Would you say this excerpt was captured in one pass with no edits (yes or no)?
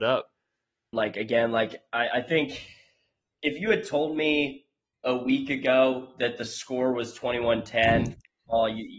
no